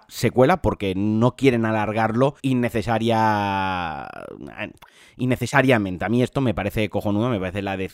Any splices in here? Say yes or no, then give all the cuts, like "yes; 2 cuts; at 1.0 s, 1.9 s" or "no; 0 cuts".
yes; 1 cut; at 2.4 s